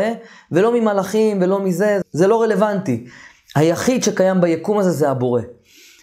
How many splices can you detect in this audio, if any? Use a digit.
1